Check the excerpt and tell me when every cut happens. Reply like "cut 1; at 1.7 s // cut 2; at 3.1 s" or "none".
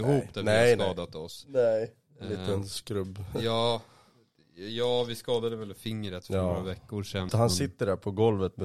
cut 1; at 7.3 s